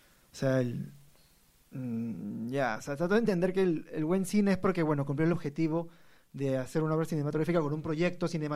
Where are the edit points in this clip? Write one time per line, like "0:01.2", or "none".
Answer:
none